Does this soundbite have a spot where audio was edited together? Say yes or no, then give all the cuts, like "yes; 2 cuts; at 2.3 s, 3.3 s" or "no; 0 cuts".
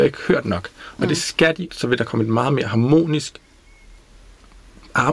yes; 1 cut; at 1.7 s